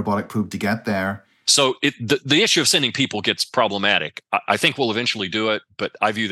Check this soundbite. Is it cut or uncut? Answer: cut